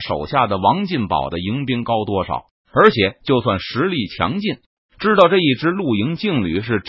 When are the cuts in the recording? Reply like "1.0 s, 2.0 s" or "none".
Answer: 2.6 s, 4.8 s